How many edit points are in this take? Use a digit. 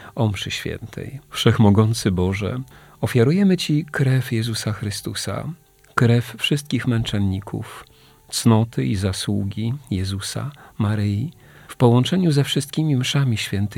2